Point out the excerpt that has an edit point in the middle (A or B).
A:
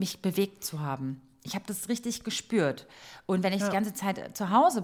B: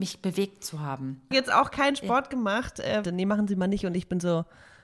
B